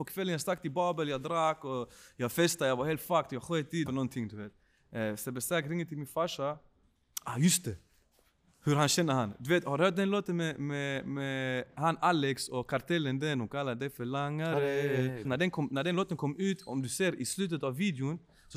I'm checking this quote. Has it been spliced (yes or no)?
yes